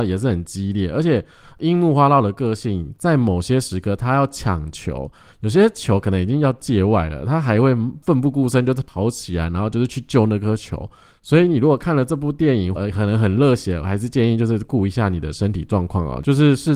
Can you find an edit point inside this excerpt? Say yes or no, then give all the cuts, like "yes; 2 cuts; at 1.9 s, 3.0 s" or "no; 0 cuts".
yes; 2 cuts; at 11.1 s, 12.8 s